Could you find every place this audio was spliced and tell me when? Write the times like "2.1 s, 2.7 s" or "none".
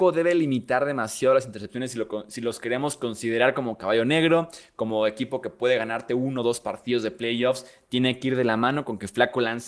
none